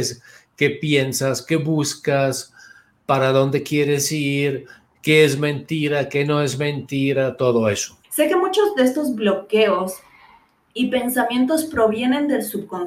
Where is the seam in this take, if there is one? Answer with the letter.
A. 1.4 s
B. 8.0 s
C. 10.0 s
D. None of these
B